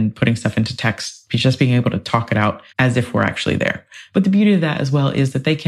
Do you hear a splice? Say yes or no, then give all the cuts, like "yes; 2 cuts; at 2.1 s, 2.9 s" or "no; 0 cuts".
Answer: yes; 2 cuts; at 2.7 s, 4.1 s